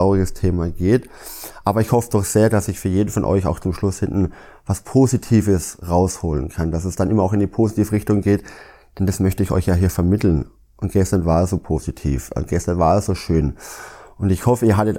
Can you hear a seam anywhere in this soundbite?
no; 0 cuts

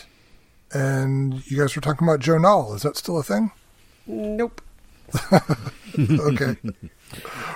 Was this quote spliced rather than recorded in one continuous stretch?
no; 0 cuts

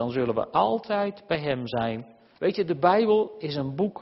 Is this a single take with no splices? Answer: no; 1 cut; at 2.3 s

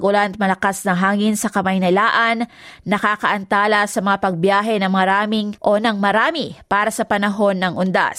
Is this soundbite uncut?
no; 1 cut; at 5.6 s

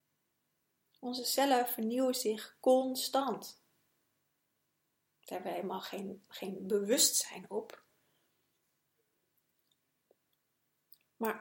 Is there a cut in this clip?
no; 0 cuts

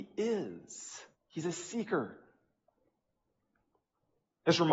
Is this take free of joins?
no; 1 cut; at 1.1 s

